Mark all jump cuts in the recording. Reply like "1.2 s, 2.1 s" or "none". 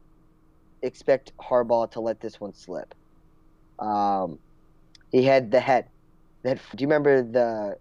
6.7 s